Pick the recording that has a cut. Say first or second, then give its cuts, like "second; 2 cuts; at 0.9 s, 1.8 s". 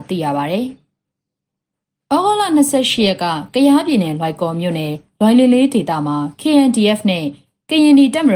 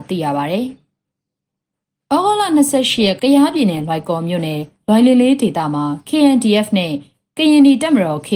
second; 1 cut; at 3.2 s